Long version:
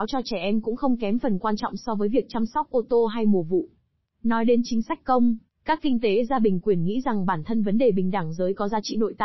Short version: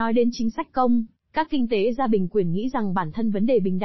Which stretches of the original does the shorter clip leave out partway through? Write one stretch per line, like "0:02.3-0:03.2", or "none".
none